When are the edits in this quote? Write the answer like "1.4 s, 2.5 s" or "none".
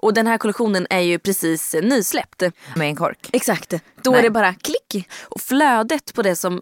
2.8 s